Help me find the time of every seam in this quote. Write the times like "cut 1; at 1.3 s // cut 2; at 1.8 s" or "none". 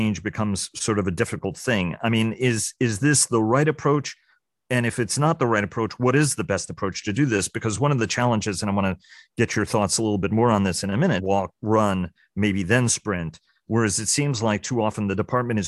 cut 1; at 11.2 s